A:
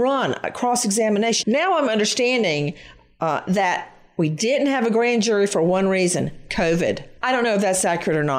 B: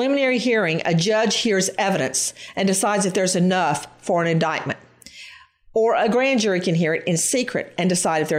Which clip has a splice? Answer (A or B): A